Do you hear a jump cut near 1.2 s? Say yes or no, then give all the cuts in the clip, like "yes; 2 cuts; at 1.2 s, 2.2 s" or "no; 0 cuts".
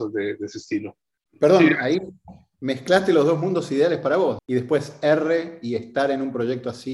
yes; 2 cuts; at 1.2 s, 4.4 s